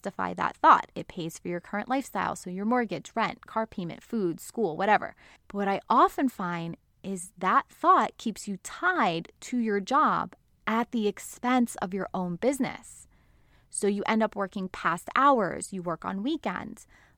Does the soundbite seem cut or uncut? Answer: cut